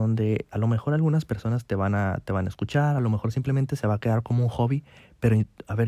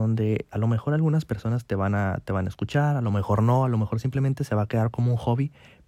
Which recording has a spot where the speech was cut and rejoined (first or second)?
first